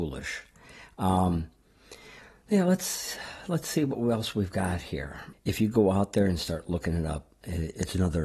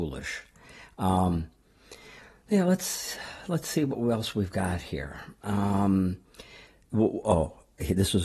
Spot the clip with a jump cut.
first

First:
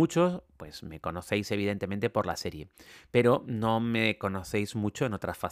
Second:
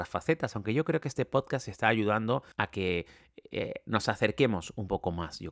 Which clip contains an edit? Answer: second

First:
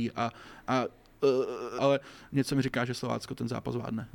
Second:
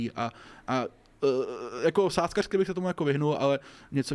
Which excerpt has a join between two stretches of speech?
first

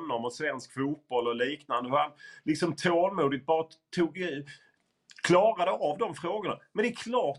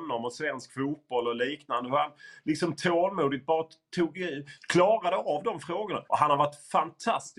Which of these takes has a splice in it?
second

